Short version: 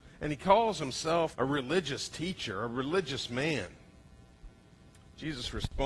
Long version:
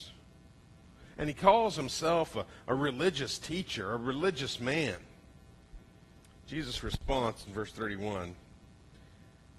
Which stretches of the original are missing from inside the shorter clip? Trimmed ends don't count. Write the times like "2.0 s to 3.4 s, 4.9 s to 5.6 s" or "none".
2.3 s to 2.6 s